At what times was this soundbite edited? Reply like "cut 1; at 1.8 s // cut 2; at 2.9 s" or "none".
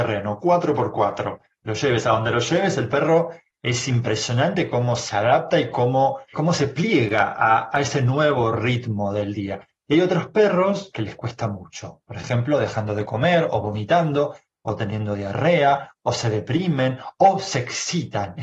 cut 1; at 6.3 s